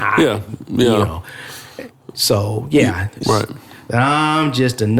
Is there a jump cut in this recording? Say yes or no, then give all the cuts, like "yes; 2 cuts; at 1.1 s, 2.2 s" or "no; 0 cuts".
yes; 1 cut; at 3.2 s